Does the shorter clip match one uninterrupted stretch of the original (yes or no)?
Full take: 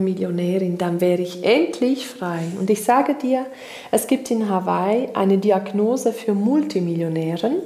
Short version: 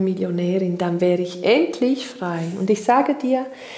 yes